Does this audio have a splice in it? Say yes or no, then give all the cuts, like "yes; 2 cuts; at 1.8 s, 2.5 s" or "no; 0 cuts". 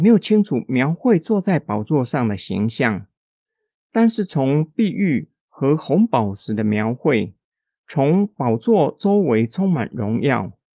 no; 0 cuts